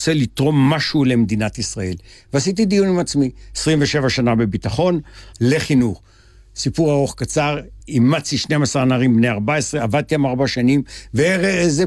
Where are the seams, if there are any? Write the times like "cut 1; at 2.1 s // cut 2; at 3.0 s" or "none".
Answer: cut 1; at 5.3 s // cut 2; at 7.8 s